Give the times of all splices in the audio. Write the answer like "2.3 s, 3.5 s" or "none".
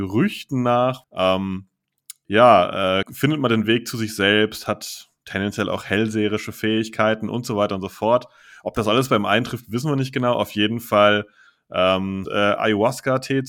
1.0 s, 3.0 s, 12.3 s

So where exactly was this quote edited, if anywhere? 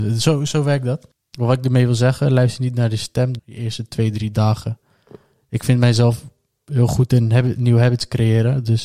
3.4 s

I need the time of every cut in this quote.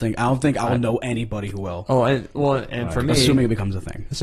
none

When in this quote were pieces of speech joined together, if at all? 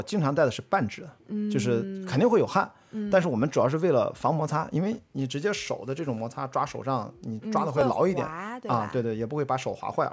1.2 s

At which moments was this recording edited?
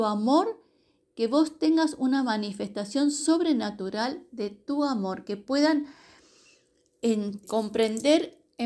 7.4 s

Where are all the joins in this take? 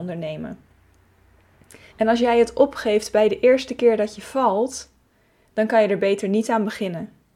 1.9 s

